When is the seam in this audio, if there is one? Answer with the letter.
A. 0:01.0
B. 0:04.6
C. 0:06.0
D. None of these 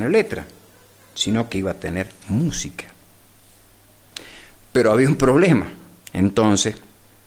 C